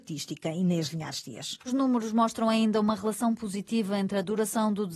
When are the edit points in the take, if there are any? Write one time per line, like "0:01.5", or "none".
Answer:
0:01.7

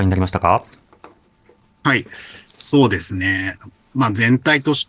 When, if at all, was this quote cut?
none

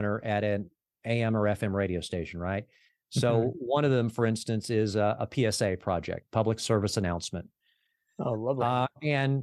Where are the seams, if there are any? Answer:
none

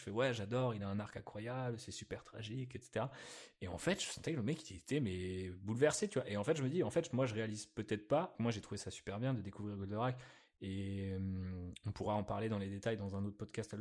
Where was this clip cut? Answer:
0:08.3

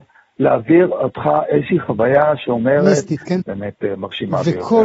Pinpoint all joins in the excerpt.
0:03.4

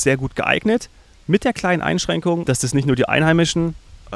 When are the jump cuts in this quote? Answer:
0:02.4

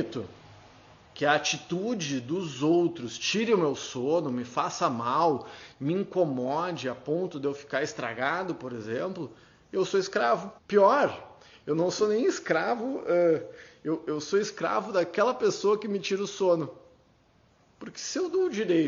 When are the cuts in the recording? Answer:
0:10.6

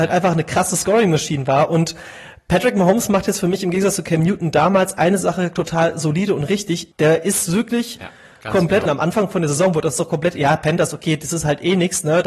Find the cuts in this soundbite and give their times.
0:06.9
0:08.9

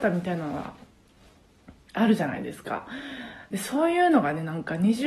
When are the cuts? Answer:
none

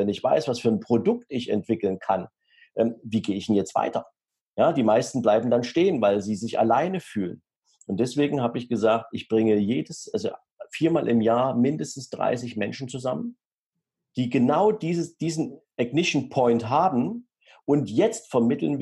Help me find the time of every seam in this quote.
none

